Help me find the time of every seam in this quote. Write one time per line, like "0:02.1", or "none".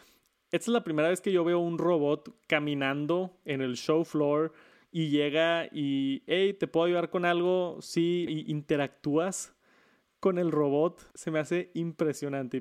0:08.3
0:11.1